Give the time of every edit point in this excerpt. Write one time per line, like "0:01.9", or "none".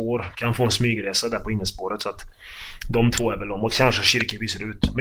none